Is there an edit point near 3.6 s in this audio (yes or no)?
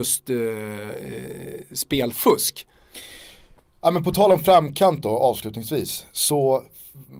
no